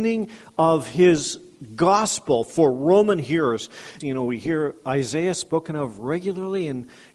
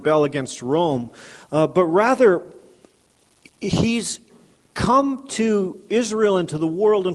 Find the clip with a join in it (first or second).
first